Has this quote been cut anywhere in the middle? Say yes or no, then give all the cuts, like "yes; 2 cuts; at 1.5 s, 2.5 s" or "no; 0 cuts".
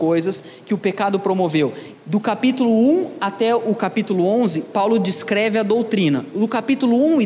yes; 1 cut; at 1.9 s